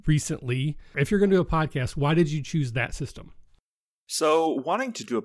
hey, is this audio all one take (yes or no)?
no